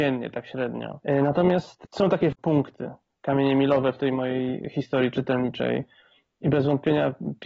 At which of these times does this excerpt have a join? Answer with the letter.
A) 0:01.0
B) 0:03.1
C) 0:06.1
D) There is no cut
A